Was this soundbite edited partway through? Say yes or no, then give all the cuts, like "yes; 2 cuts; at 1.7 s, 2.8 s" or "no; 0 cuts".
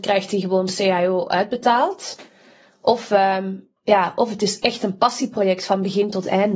yes; 1 cut; at 3.8 s